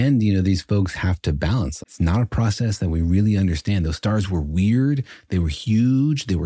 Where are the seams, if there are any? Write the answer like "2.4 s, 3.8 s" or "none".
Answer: 1.8 s